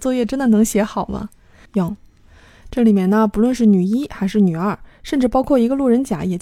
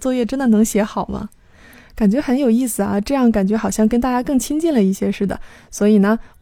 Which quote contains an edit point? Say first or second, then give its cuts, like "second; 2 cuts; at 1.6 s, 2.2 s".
first; 1 cut; at 1.7 s